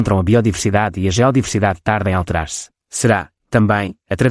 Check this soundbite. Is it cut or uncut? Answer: cut